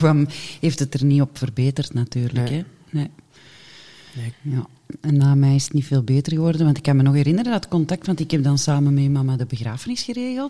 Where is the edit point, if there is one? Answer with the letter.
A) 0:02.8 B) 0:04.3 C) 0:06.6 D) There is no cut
B